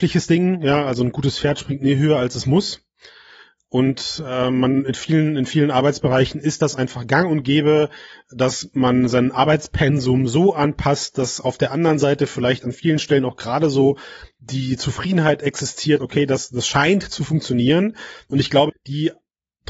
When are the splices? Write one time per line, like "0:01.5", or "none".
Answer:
0:16.0
0:18.7